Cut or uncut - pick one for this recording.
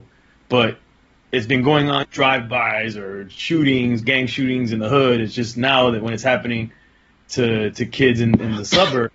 cut